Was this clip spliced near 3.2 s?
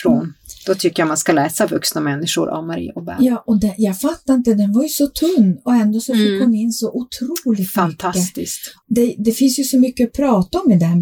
no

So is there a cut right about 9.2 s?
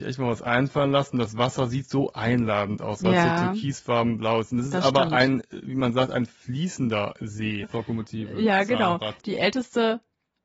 yes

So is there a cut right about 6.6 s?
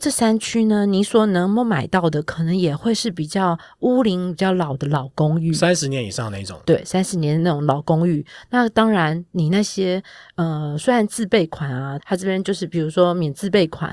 no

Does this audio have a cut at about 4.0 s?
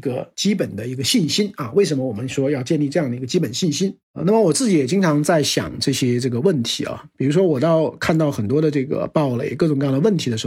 yes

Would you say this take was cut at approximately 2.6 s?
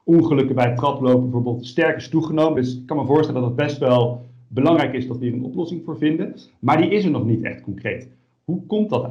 no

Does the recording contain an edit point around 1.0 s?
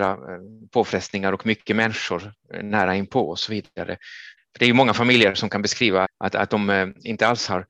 no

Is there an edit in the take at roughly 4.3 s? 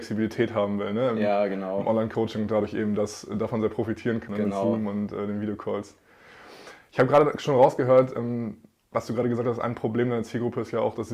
yes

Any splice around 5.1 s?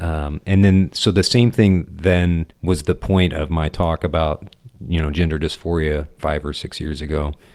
no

